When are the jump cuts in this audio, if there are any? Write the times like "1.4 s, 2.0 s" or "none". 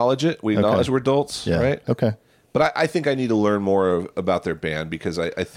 none

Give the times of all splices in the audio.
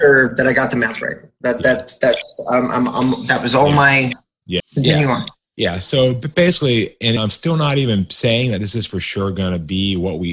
4.6 s, 7.2 s

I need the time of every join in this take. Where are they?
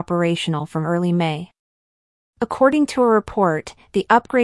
none

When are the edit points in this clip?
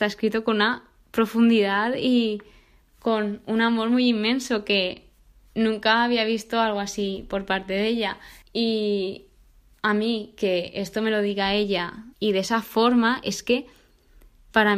8.4 s, 12.1 s

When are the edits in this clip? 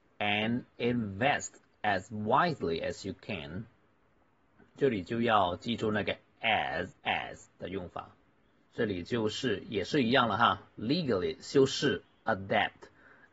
7.0 s, 8.7 s

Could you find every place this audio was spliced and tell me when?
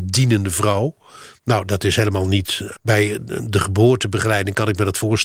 2.8 s

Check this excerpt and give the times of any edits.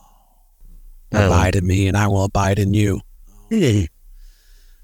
none

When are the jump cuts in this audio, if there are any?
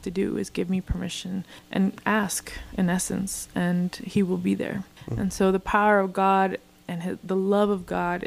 none

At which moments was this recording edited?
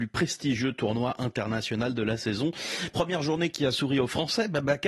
none

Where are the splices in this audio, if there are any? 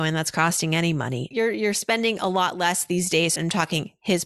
1.3 s, 3.4 s

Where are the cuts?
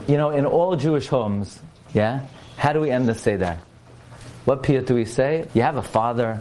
1.9 s, 4.4 s, 5.5 s

